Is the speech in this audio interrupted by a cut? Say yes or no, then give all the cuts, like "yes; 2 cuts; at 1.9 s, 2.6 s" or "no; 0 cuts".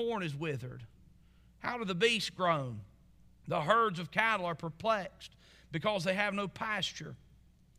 no; 0 cuts